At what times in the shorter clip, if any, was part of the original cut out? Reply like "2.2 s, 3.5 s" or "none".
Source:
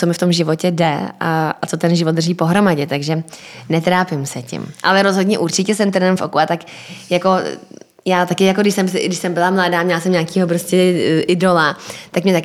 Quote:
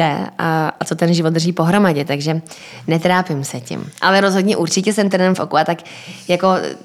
none